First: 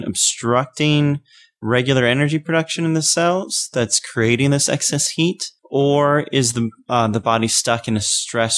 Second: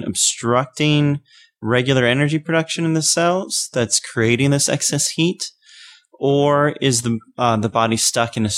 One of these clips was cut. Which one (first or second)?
first